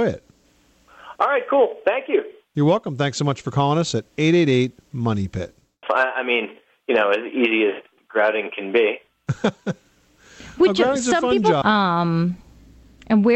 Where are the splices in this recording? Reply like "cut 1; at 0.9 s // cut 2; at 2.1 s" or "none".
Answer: cut 1; at 5.8 s // cut 2; at 11.6 s